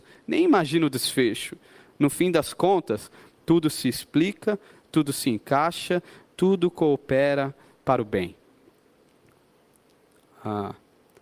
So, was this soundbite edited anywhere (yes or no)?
no